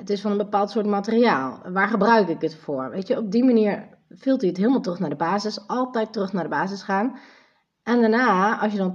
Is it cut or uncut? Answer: uncut